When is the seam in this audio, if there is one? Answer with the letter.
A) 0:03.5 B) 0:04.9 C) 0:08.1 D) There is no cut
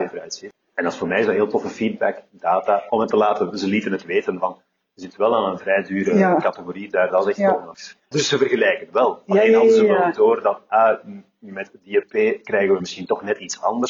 C